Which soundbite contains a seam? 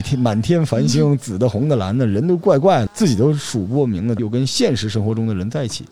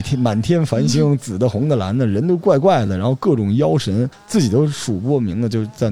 first; 2 cuts; at 2.9 s, 4.2 s

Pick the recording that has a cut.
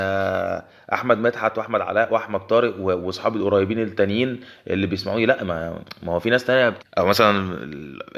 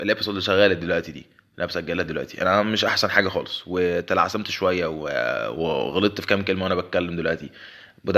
first; 1 cut; at 6.8 s

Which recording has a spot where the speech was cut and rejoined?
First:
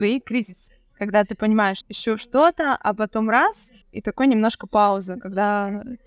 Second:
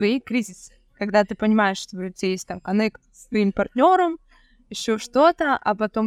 first; 2 cuts; at 1.8 s, 3.8 s

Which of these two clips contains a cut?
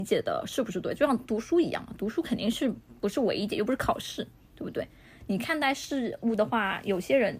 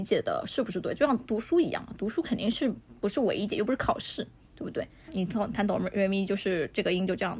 second; 1 cut; at 5.1 s

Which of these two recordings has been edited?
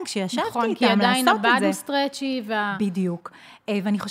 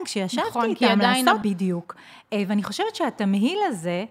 second; 1 cut; at 1.4 s

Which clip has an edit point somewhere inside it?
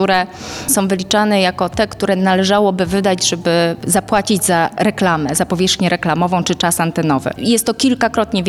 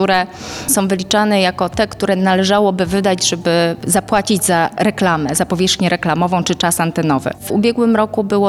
first; 1 cut; at 7.4 s

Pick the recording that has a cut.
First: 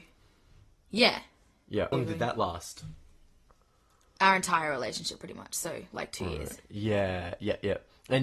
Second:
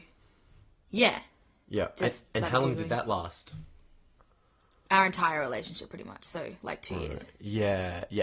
first; 1 cut; at 1.9 s

